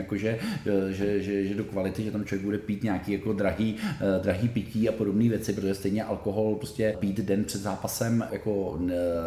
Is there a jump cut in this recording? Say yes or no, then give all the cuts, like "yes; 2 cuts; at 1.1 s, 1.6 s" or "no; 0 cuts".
yes; 2 cuts; at 6.9 s, 8.3 s